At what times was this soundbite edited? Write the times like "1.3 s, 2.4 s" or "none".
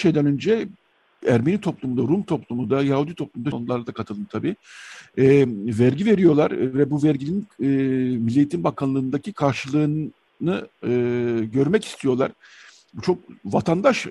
3.5 s

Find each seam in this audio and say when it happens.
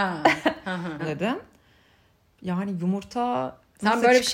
1.0 s

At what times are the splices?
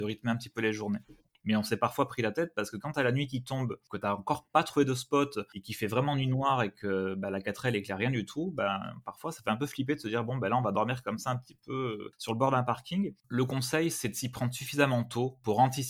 1.4 s

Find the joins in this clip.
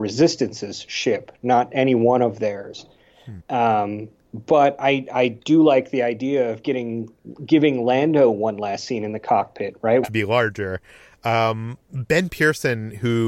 3.4 s, 10.0 s

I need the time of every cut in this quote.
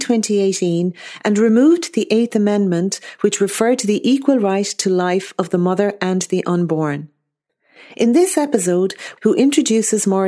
9.2 s

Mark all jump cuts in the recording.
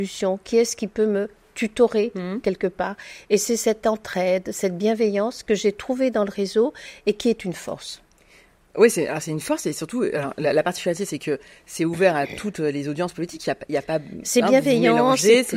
none

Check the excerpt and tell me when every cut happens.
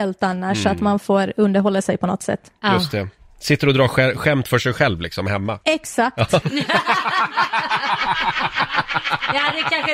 6.4 s

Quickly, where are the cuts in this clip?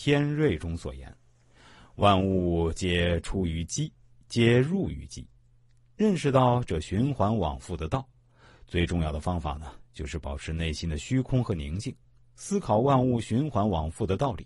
none

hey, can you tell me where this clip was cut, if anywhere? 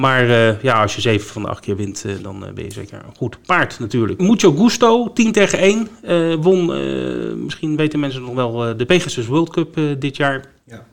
4.2 s

